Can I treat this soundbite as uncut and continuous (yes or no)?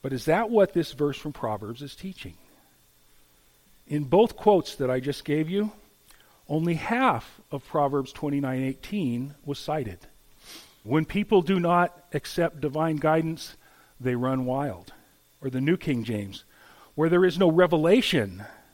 no